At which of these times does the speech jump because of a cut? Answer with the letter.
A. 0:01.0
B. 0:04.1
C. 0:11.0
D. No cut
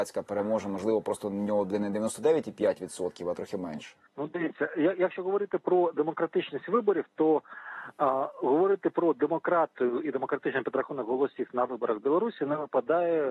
B